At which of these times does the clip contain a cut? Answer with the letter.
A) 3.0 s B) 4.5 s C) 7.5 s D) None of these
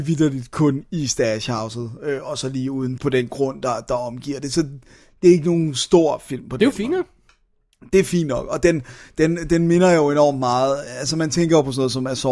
A